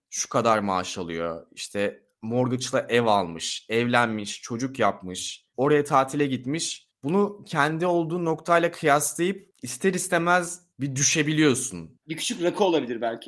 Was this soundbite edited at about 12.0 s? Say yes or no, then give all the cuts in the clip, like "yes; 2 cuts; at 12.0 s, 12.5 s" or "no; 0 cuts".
yes; 2 cuts; at 5.5 s, 12.0 s